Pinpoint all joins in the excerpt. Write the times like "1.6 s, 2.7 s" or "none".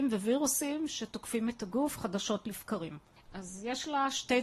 3.2 s